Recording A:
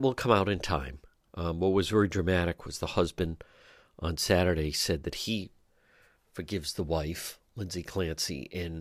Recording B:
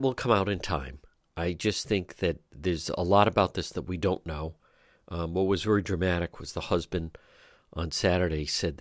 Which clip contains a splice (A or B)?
A